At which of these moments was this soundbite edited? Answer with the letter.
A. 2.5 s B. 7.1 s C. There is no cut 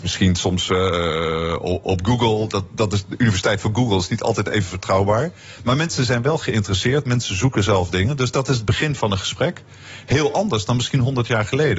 C